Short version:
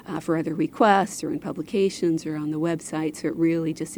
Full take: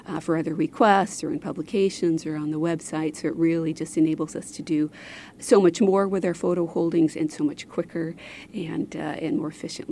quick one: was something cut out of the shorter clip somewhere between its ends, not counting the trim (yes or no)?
no